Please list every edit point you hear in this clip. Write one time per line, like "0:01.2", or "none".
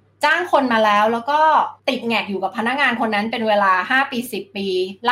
0:01.8